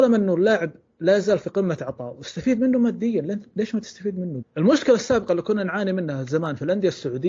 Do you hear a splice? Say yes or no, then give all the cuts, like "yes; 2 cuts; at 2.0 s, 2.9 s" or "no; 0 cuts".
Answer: yes; 1 cut; at 4.4 s